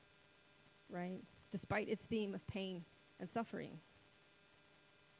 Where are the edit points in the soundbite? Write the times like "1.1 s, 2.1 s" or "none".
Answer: none